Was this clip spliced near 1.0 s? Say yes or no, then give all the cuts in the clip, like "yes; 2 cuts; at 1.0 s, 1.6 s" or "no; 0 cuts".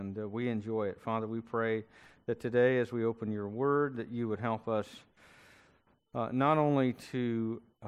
no; 0 cuts